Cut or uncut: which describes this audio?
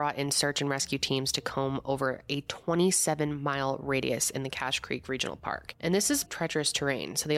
cut